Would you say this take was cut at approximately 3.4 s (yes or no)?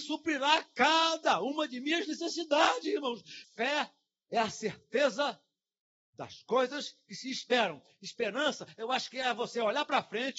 yes